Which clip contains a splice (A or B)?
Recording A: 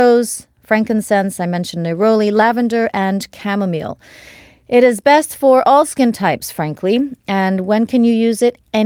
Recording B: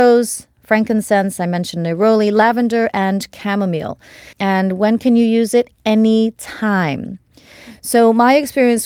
B